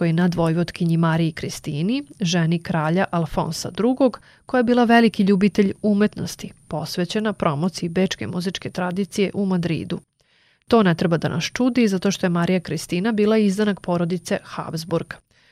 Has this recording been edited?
no; 0 cuts

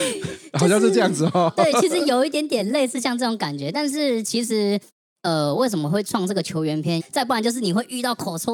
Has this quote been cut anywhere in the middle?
yes; 1 cut; at 7.0 s

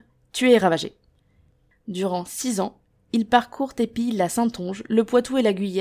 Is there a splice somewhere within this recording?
no; 0 cuts

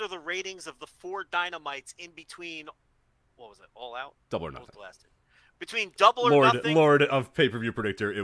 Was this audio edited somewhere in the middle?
no; 0 cuts

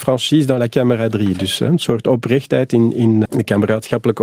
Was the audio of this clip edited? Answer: yes; 1 cut; at 3.3 s

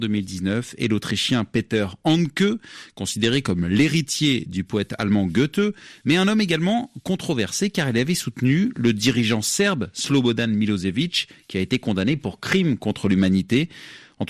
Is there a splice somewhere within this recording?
no; 0 cuts

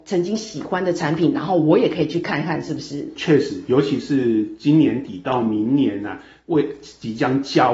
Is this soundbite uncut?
yes; 0 cuts

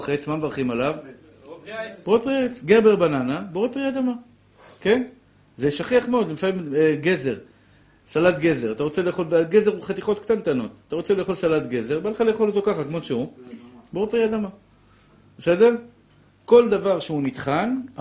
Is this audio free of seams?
yes; 0 cuts

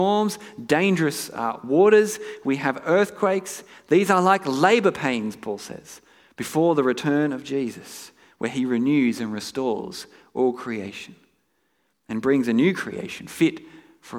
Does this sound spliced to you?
no; 0 cuts

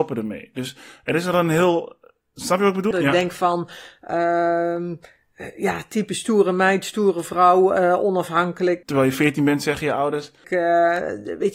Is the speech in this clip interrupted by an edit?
yes; 3 cuts; at 2.9 s, 8.8 s, 10.4 s

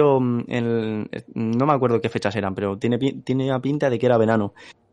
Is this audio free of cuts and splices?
yes; 0 cuts

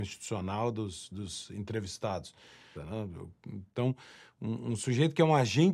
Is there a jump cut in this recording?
yes; 1 cut; at 2.7 s

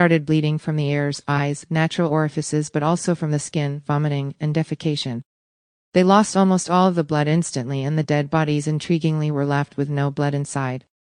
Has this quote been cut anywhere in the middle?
no; 0 cuts

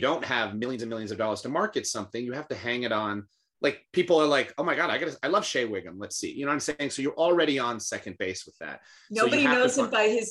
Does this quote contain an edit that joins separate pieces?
no; 0 cuts

